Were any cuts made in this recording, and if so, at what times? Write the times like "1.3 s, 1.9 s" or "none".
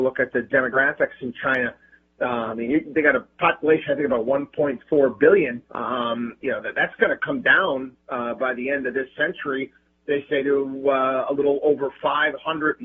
5.7 s